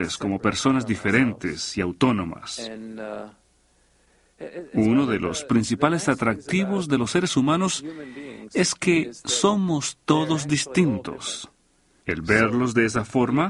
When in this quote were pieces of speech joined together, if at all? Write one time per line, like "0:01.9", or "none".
0:12.0